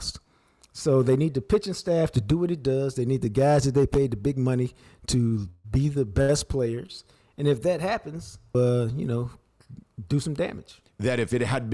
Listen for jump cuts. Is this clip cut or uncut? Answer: cut